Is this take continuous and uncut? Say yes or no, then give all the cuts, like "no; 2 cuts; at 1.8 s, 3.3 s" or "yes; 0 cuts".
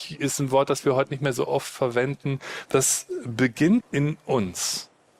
no; 2 cuts; at 2.7 s, 3.8 s